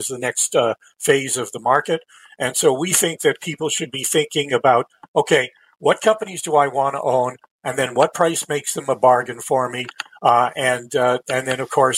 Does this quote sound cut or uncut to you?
uncut